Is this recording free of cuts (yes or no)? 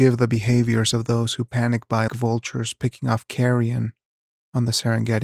no